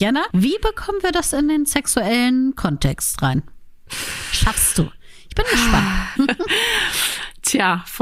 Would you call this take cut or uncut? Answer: cut